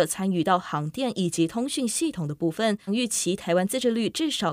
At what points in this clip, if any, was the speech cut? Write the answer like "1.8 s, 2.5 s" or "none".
2.9 s